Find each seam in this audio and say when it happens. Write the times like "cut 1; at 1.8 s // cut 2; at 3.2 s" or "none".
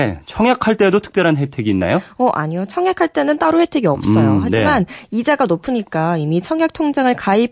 none